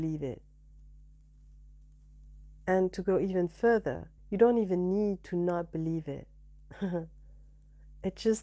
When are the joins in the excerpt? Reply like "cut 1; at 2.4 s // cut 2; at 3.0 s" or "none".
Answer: cut 1; at 4.2 s